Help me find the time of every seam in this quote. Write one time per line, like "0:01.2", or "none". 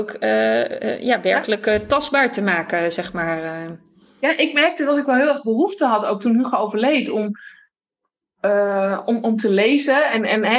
none